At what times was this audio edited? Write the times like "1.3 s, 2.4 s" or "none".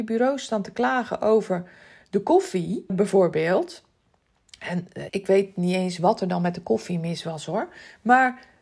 2.9 s, 5.1 s